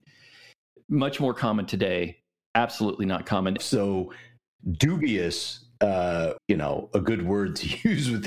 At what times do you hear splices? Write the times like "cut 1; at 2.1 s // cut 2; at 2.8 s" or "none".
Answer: cut 1; at 3.6 s // cut 2; at 6.4 s